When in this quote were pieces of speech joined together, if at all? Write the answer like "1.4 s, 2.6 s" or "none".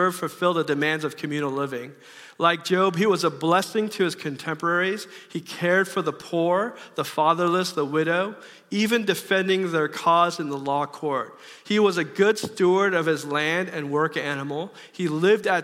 none